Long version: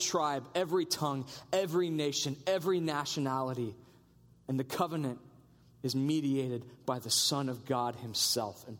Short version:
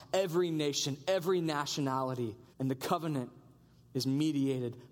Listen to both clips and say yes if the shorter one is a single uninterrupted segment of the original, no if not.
no